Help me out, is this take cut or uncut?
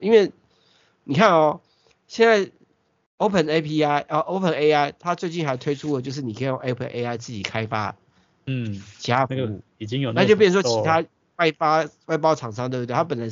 uncut